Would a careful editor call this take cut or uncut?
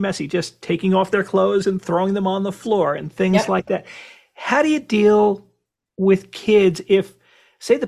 uncut